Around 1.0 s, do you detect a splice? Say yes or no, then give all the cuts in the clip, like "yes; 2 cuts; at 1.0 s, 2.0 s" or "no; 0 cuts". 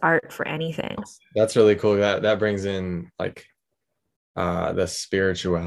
yes; 1 cut; at 1.0 s